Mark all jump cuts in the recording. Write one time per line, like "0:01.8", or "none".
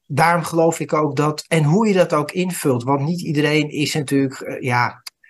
none